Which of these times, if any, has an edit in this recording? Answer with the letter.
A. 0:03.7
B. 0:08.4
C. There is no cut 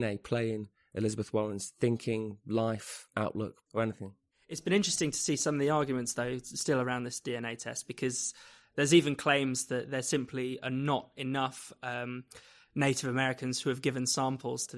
A